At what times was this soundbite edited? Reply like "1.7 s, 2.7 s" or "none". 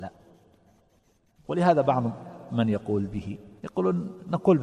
3.6 s